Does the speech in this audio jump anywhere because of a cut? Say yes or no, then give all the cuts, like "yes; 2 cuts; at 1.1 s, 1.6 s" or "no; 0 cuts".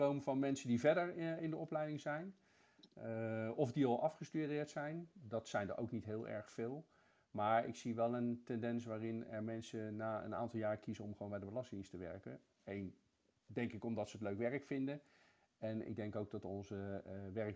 no; 0 cuts